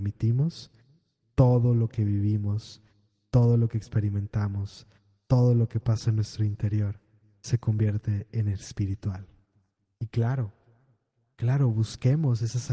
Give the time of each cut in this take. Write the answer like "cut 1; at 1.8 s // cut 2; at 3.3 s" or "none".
cut 1; at 9.9 s